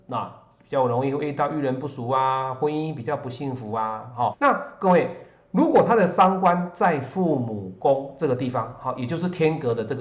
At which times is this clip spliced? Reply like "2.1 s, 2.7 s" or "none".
4.3 s